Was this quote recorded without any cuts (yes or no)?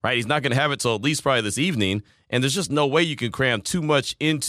yes